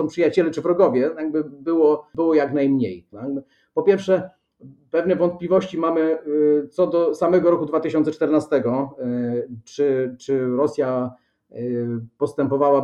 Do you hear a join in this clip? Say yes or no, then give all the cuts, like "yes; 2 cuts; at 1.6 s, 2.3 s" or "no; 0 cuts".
yes; 1 cut; at 3.1 s